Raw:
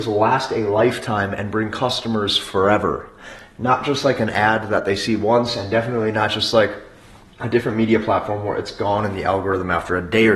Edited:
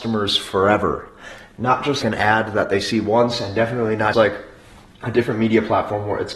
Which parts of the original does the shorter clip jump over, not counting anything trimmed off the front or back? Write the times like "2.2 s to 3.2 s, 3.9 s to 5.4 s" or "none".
4.0 s to 4.2 s, 6.3 s to 6.5 s